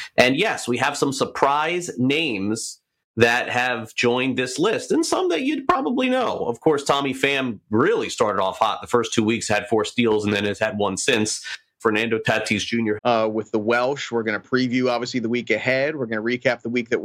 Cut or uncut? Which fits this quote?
cut